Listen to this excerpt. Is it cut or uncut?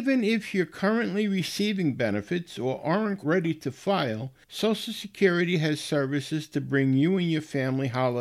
cut